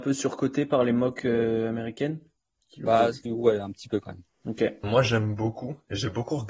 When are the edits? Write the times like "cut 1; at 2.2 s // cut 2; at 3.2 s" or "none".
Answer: cut 1; at 3.3 s // cut 2; at 4.8 s